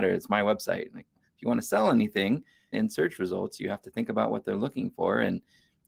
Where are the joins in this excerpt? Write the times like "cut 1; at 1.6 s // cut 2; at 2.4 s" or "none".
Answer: cut 1; at 1.1 s // cut 2; at 2.7 s